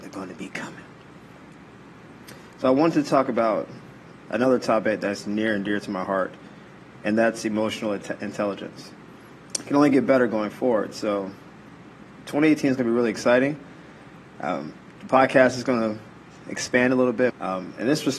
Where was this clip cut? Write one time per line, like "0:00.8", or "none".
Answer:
0:09.5
0:17.3